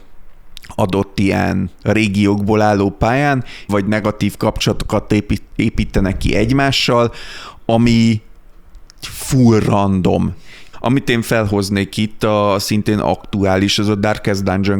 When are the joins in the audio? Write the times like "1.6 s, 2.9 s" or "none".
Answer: 1.8 s, 3.7 s, 10.7 s